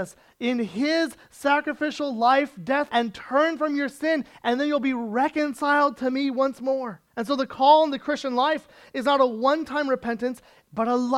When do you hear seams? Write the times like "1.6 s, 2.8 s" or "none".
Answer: 2.9 s, 7.1 s